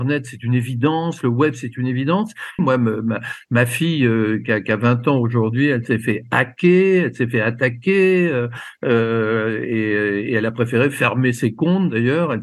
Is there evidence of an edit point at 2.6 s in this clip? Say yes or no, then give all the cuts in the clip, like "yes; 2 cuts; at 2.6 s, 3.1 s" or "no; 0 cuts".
yes; 1 cut; at 2.6 s